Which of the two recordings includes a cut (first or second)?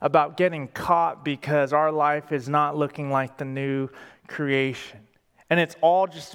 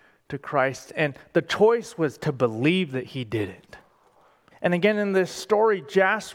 second